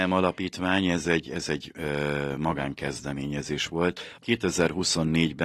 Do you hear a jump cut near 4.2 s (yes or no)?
yes